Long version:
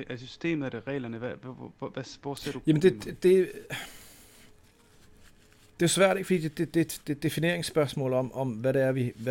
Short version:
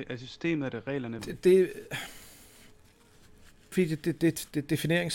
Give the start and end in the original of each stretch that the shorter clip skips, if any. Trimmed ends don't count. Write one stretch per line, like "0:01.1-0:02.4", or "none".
0:01.2-0:03.0
0:05.5-0:06.2